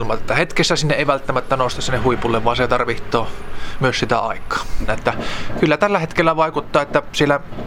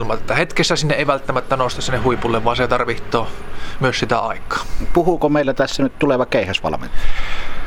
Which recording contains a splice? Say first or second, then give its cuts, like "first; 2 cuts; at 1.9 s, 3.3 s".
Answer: first; 1 cut; at 4.9 s